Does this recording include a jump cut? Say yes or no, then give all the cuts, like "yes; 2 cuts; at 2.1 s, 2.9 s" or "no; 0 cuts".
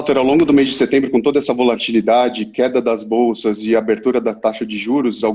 no; 0 cuts